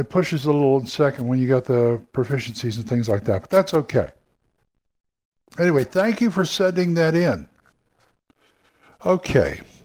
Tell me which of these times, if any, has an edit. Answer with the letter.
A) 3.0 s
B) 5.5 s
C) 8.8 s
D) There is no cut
D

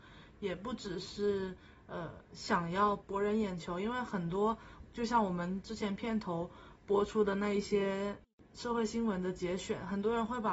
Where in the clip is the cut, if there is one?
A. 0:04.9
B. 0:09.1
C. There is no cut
C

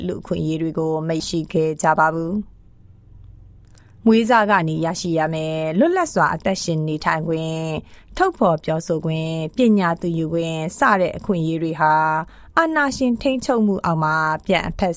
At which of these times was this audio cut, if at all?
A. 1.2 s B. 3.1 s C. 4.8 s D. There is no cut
A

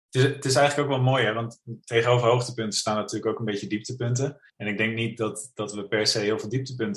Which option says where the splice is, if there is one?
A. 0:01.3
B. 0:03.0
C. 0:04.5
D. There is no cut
C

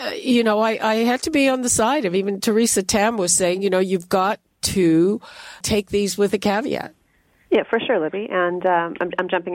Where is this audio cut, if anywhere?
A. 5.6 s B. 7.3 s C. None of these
A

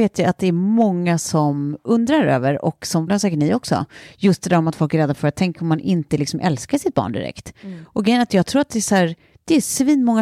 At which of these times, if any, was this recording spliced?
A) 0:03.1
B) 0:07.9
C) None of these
A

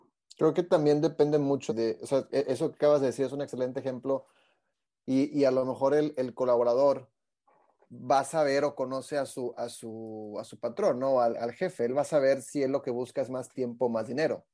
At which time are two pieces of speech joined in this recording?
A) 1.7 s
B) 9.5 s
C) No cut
A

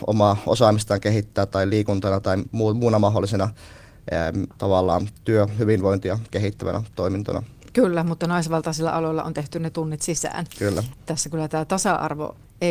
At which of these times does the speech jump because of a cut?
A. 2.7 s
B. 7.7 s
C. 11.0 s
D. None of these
D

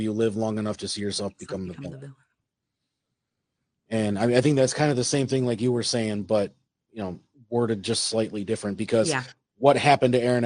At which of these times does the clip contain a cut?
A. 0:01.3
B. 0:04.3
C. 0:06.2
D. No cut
D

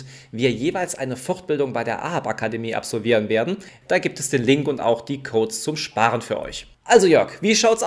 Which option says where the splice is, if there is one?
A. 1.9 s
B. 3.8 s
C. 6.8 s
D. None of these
B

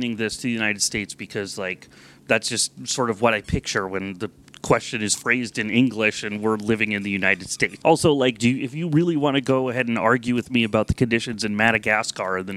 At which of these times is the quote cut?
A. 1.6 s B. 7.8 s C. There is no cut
B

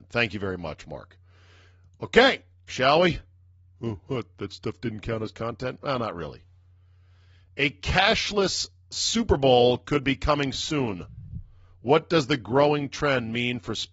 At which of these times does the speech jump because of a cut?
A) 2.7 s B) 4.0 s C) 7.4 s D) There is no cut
A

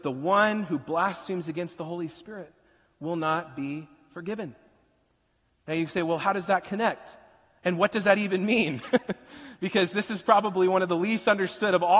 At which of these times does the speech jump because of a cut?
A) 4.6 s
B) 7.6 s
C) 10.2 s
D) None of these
D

